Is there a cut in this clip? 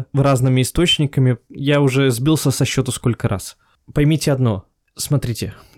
no; 0 cuts

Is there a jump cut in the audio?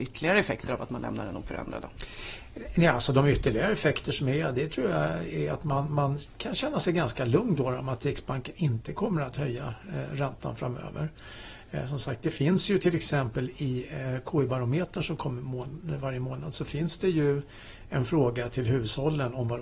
no; 0 cuts

